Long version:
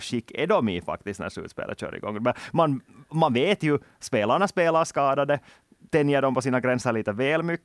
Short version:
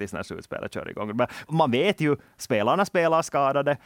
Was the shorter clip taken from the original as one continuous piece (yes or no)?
no